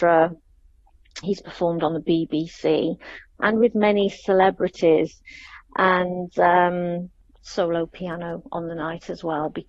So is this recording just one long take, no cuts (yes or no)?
no